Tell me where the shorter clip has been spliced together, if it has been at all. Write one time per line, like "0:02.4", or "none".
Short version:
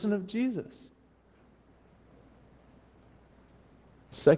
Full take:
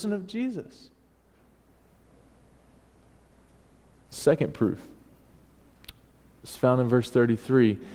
none

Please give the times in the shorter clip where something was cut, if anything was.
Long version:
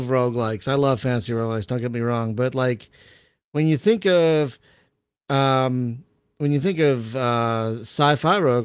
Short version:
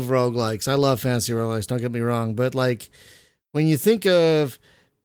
none

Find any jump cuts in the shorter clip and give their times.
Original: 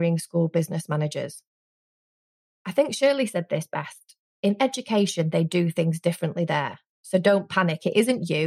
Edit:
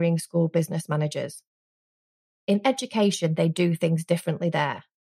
0:02.3

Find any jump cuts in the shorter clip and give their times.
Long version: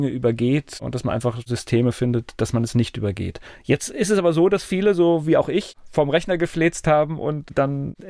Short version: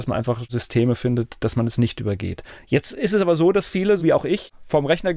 0:04.0

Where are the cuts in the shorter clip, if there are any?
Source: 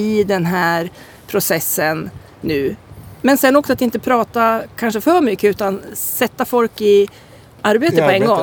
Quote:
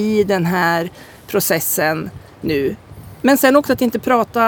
none

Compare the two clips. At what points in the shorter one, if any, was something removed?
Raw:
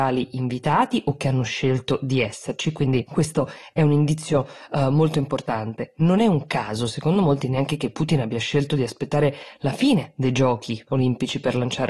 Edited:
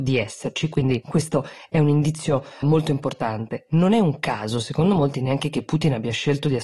0:02.6

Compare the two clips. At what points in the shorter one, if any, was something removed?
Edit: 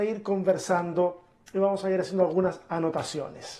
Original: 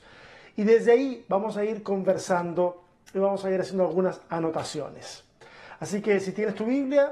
none

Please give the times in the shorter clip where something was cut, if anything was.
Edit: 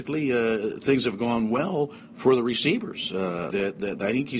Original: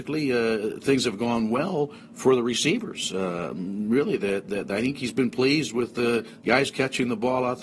0:03.5

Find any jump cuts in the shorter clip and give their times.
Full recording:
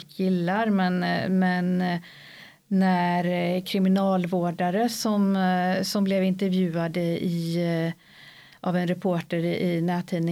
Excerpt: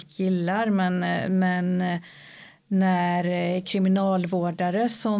none

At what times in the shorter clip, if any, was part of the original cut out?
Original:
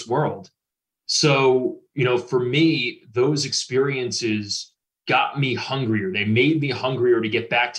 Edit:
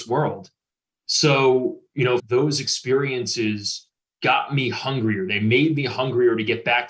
0:02.2

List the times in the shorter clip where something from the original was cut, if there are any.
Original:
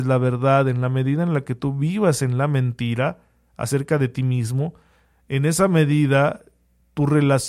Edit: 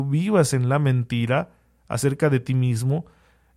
none

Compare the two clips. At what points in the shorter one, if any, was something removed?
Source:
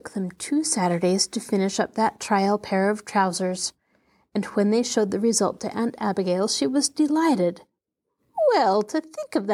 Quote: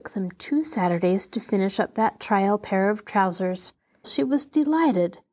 0:04.0

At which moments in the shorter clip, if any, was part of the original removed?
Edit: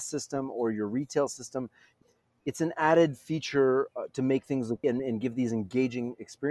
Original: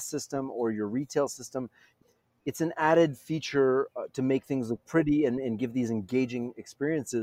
0:04.8

